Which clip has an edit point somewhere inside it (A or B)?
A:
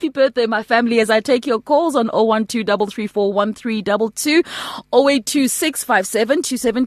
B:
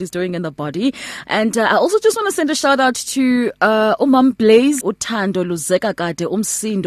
B